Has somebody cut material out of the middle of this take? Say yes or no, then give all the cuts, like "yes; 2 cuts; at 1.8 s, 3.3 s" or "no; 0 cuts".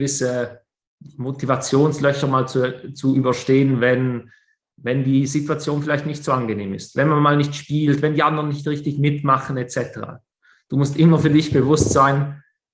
no; 0 cuts